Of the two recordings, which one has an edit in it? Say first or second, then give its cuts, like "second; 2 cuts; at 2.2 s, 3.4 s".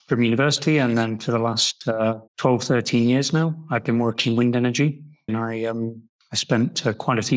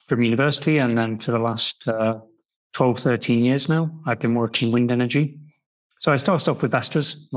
first; 2 cuts; at 2.3 s, 5.3 s